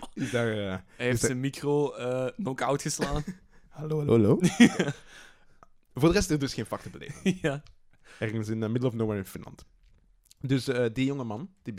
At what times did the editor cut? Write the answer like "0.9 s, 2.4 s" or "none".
none

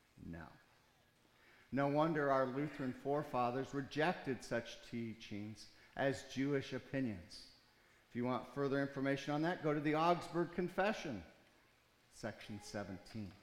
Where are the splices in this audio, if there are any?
none

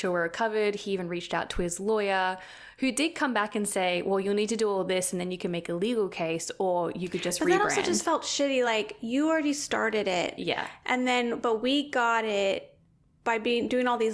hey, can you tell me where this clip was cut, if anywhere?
none

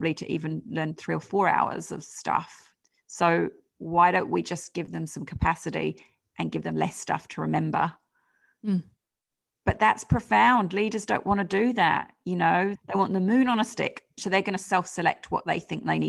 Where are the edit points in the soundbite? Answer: 12.8 s, 14.2 s

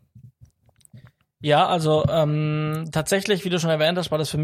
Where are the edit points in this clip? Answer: none

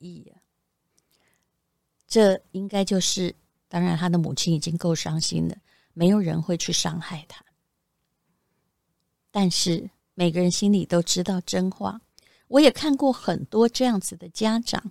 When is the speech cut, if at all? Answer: 3.5 s

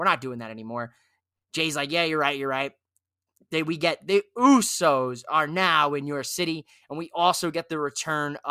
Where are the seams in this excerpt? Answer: none

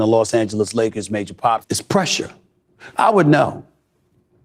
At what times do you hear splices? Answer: 1.6 s, 2.9 s

